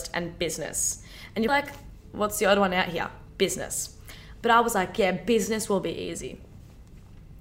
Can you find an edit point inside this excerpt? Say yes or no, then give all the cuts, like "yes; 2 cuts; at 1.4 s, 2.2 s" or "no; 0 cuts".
yes; 2 cuts; at 1.5 s, 4.4 s